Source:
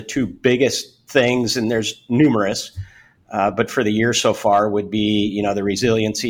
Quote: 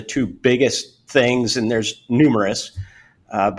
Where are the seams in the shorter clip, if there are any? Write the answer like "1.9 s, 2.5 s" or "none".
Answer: none